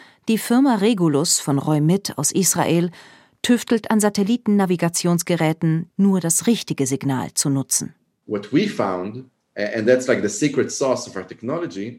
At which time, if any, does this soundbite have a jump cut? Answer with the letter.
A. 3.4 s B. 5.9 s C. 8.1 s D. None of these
B